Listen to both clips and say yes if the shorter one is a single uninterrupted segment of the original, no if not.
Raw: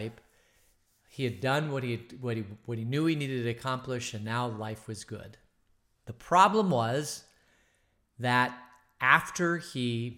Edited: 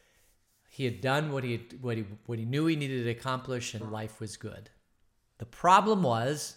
no